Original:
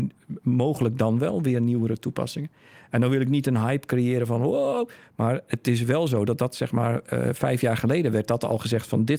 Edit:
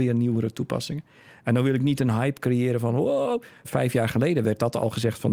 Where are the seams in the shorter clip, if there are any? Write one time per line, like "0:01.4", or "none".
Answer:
0:03.6